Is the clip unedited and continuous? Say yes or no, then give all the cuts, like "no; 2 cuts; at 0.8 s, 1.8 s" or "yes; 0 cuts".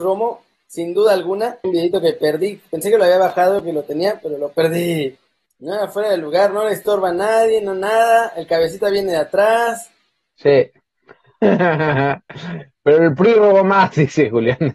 no; 2 cuts; at 1.6 s, 5.5 s